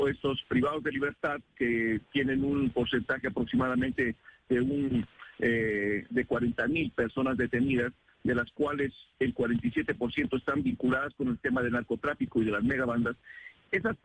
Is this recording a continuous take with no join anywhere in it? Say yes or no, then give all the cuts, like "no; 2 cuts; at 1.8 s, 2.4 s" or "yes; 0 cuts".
yes; 0 cuts